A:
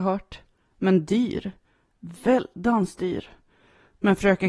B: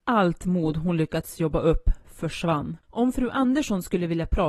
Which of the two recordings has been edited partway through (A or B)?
B